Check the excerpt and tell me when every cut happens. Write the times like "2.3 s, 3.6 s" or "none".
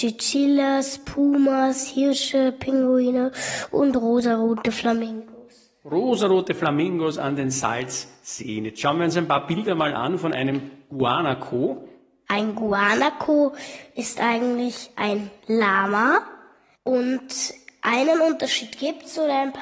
none

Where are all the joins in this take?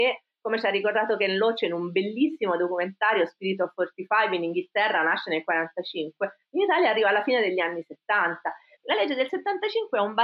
8.8 s

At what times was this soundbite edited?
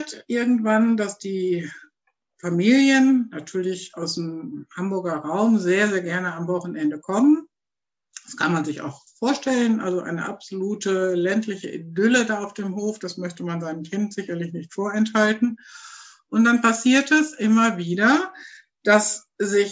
none

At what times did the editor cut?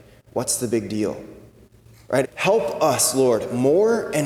2.2 s

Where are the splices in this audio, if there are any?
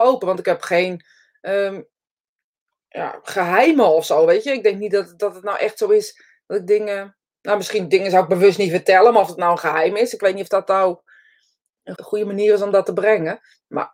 11.9 s

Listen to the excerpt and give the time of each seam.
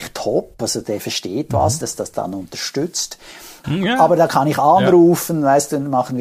1.8 s, 3.6 s

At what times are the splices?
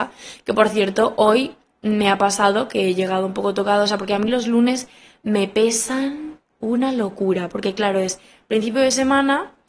none

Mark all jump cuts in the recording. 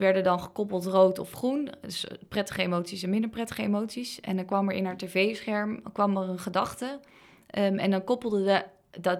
none

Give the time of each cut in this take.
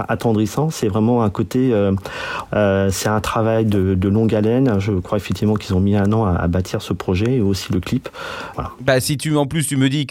2.5 s, 8.5 s

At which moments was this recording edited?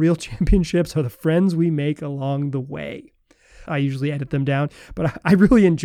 3.6 s

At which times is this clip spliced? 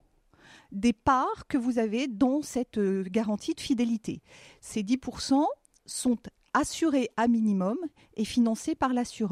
none

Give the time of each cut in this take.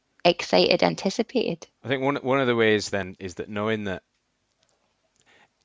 1.7 s, 3.2 s

